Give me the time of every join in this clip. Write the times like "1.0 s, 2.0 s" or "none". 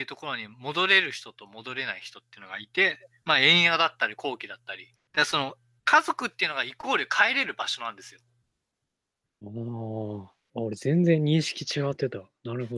4.9 s